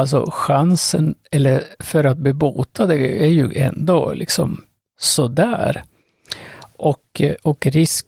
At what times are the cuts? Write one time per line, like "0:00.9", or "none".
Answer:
none